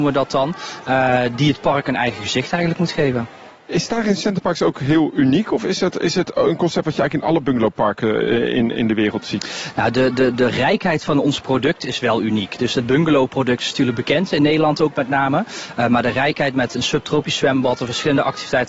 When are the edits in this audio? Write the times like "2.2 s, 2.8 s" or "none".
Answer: 3.6 s